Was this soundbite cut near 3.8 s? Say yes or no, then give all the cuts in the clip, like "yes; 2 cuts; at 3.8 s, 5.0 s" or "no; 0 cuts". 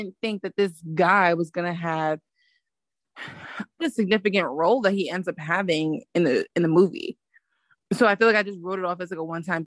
yes; 1 cut; at 3.8 s